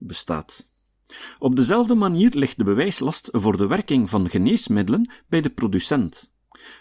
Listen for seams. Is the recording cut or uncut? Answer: uncut